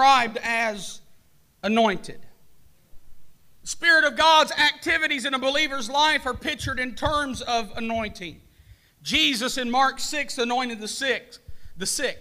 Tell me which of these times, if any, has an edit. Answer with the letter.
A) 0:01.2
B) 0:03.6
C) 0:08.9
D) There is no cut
B